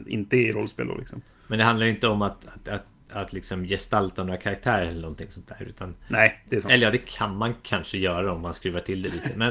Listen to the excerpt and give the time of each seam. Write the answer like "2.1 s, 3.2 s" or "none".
none